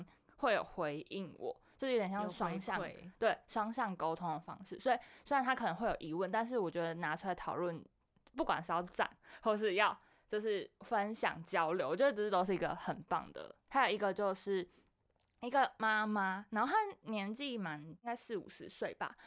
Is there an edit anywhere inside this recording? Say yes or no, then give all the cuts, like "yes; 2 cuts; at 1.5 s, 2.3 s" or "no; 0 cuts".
yes; 1 cut; at 13.7 s